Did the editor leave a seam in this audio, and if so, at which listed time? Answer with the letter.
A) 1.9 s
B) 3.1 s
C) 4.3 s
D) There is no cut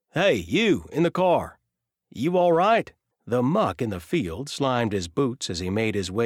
B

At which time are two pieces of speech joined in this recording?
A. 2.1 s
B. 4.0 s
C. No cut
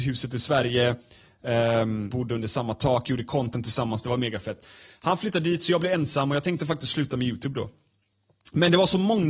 A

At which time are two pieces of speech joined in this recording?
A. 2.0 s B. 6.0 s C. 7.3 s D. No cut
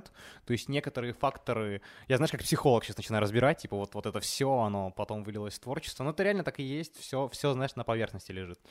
D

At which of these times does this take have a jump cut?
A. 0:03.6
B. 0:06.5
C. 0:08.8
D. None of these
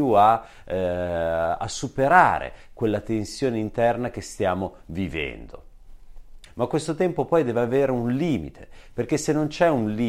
B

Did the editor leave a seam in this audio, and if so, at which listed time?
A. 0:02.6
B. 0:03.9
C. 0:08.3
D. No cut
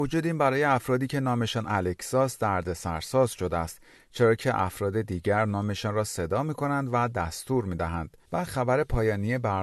C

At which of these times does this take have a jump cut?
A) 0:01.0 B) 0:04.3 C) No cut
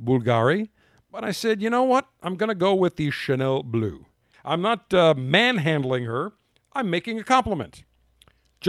B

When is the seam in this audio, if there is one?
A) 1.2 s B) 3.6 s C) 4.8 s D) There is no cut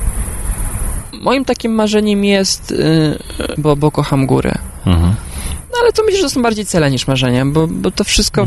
B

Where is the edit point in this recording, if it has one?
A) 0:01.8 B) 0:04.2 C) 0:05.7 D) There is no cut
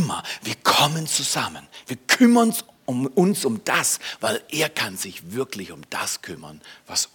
B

